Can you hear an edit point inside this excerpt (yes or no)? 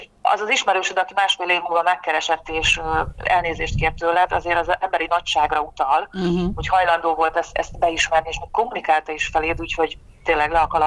no